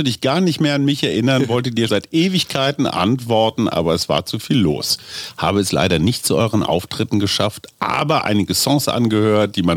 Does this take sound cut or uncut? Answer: cut